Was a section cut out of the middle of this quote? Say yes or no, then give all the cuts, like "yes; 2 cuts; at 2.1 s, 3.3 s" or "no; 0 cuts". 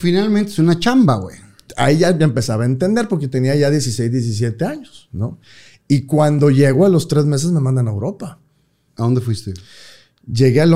yes; 1 cut; at 8.9 s